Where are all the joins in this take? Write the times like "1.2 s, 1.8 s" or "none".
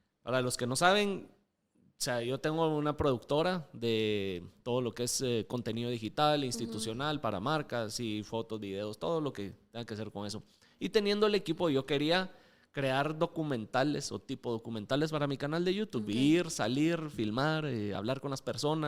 none